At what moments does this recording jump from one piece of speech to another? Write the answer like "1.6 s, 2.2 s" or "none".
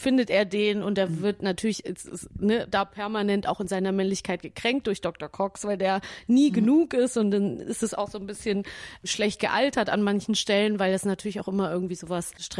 none